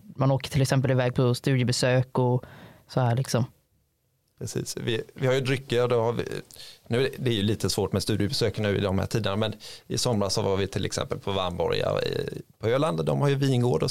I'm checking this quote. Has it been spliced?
no; 0 cuts

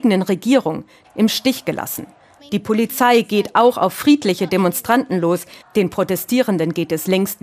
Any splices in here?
yes; 3 cuts; at 1.0 s, 2.4 s, 5.6 s

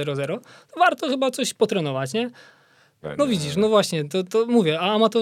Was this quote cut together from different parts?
yes; 1 cut; at 3.0 s

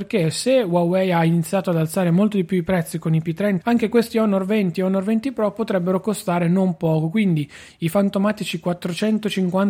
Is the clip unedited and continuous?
no; 1 cut; at 3.6 s

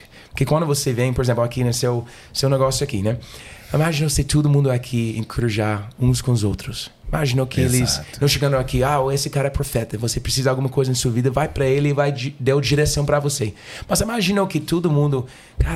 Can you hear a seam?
no; 0 cuts

